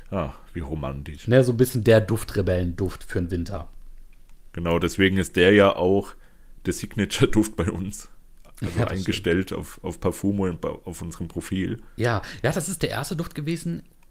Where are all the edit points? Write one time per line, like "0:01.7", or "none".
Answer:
none